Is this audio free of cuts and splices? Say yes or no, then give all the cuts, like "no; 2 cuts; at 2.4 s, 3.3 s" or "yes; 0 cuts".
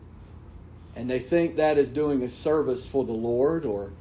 no; 1 cut; at 1.6 s